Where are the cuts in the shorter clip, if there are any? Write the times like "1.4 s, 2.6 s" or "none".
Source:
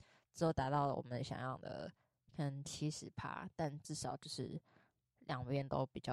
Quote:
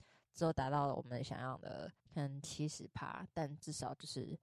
2.0 s